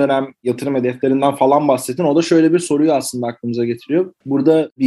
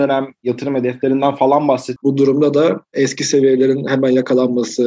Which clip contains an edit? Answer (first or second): second